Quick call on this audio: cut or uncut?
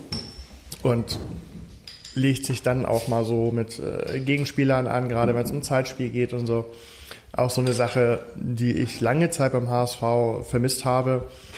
uncut